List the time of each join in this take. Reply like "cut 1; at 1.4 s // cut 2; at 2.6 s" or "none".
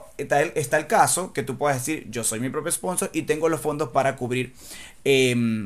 none